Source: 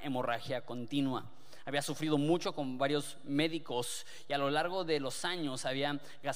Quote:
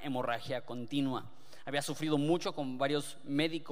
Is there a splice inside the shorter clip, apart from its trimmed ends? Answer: no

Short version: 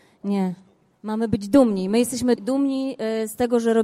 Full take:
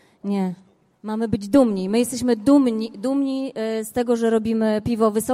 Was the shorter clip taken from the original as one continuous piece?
no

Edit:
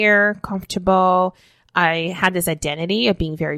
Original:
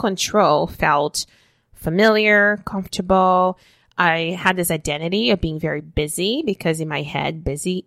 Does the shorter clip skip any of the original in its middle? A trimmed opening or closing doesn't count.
no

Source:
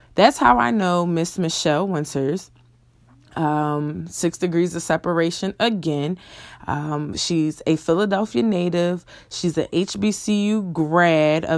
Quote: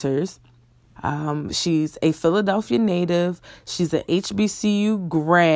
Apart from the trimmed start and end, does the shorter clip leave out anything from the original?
yes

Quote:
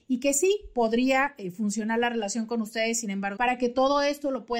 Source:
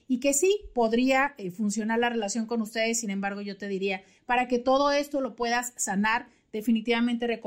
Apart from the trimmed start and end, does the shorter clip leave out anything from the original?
yes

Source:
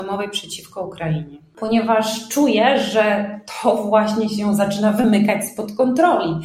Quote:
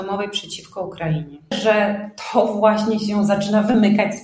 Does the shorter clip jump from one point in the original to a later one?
yes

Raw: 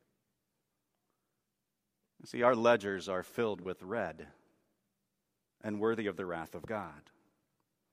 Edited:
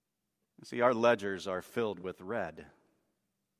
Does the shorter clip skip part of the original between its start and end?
no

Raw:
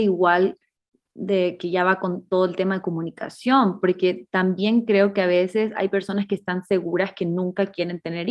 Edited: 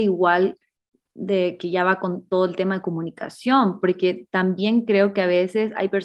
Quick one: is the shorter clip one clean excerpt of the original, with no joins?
yes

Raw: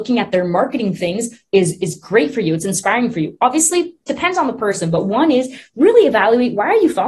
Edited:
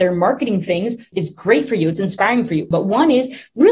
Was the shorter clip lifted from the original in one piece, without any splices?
no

